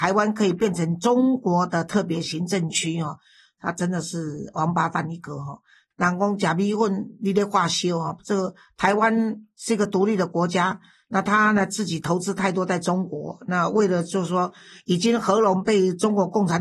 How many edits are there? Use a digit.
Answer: 0